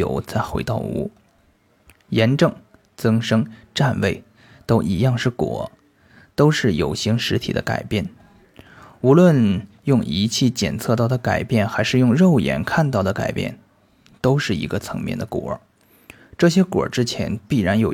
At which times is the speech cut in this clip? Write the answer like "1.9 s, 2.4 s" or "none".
none